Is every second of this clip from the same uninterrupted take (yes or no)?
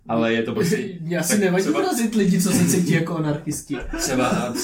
yes